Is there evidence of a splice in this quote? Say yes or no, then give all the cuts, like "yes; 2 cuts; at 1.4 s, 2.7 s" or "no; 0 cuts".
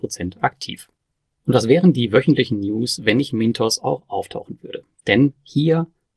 no; 0 cuts